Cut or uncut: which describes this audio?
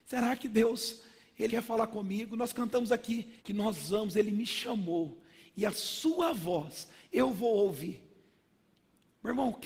cut